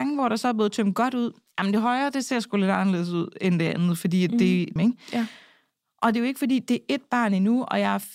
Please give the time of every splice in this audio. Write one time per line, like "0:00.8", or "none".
0:04.8